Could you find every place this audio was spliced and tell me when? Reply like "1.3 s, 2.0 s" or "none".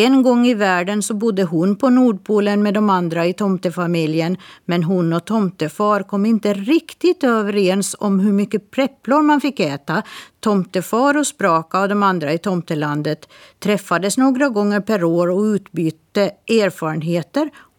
10.3 s